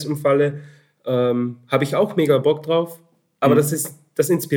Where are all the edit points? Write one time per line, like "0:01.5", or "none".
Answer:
none